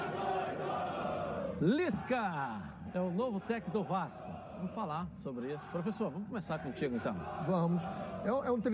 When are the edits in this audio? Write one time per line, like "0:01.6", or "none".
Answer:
none